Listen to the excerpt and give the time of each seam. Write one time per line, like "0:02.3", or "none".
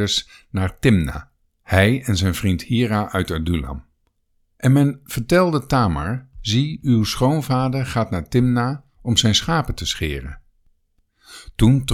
none